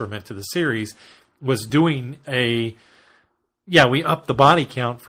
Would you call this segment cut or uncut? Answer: uncut